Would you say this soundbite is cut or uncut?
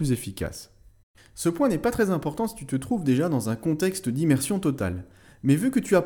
cut